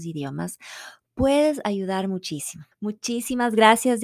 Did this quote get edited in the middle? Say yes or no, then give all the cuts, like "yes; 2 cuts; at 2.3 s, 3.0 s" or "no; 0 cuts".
yes; 1 cut; at 2.7 s